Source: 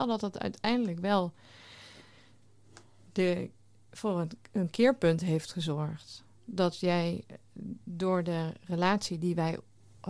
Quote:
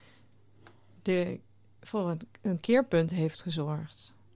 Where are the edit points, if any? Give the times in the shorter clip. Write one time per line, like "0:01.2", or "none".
none